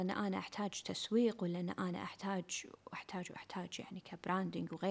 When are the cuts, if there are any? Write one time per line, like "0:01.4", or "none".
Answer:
none